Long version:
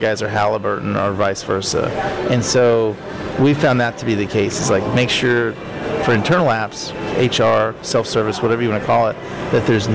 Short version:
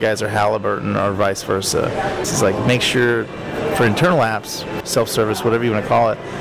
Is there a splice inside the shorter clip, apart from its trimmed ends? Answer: yes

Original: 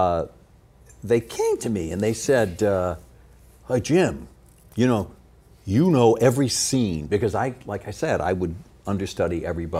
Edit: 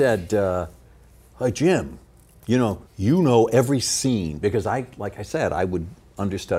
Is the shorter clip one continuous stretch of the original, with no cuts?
no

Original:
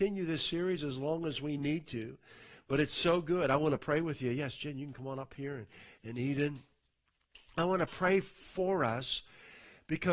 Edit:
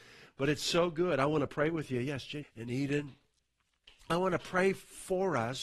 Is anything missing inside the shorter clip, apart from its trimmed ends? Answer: yes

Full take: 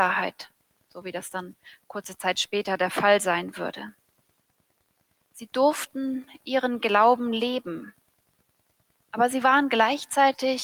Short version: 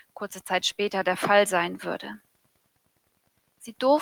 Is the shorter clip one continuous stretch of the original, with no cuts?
yes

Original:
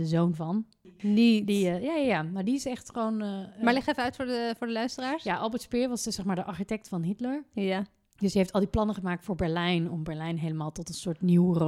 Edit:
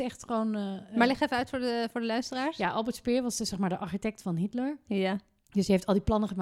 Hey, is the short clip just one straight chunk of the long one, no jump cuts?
yes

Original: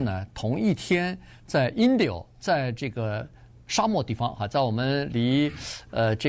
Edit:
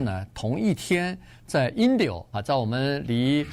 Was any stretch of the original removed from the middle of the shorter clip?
yes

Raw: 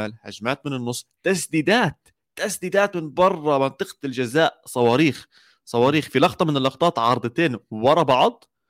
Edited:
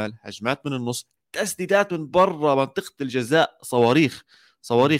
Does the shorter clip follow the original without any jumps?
no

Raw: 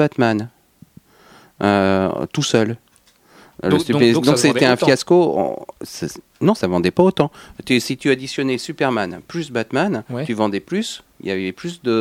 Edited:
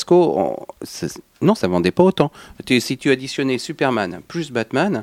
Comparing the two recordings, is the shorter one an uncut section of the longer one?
yes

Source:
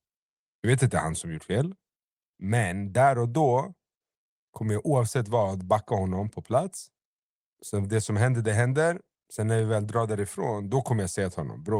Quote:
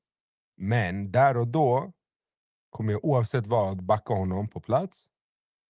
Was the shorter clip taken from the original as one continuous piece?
yes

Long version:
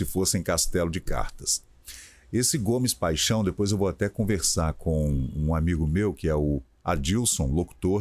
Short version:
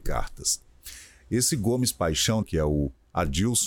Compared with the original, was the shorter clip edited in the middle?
yes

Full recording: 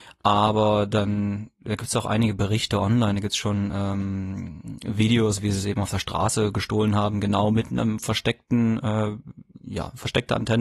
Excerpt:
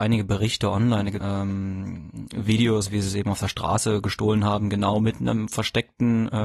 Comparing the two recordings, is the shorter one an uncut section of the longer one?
no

